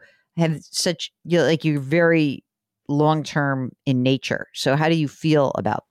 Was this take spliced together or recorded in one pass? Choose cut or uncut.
uncut